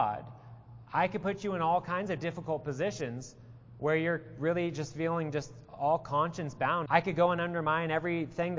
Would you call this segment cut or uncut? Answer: cut